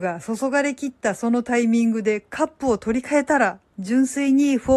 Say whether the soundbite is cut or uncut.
cut